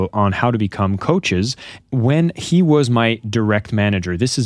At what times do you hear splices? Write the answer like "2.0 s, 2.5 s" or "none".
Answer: 1.8 s